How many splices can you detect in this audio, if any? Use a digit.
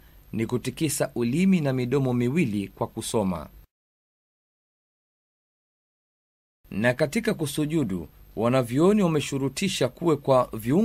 0